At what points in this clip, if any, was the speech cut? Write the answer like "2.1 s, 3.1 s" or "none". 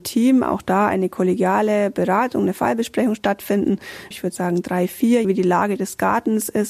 4.1 s, 5.2 s

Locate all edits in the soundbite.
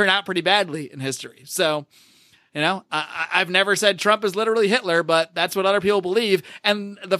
none

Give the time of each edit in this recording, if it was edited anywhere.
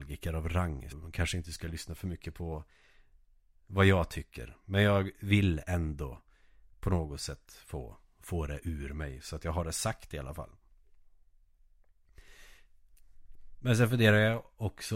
0.9 s

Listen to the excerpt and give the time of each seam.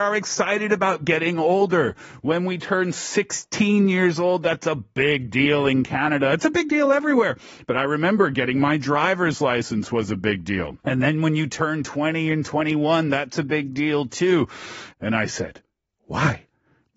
10.8 s, 14.9 s

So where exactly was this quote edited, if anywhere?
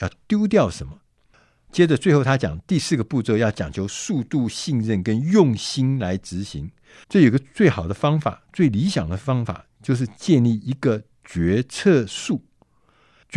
1.7 s, 7.0 s

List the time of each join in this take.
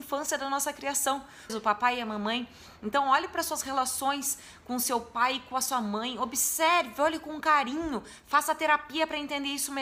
1.5 s

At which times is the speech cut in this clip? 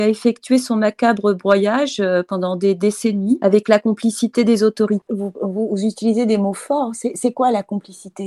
none

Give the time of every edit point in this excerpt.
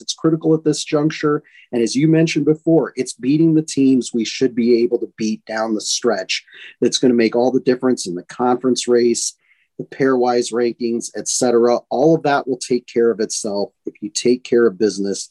none

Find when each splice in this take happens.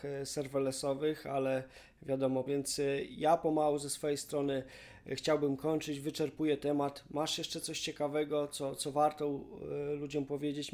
2.5 s

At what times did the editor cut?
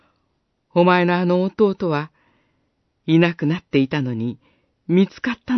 none

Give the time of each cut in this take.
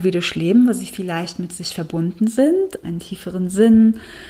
2.8 s

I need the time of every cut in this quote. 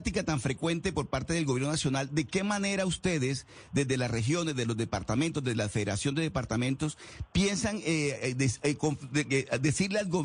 none

